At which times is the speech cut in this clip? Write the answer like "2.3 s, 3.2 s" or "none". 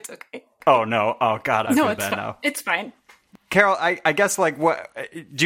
1.6 s